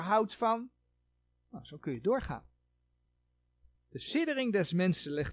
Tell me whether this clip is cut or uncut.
uncut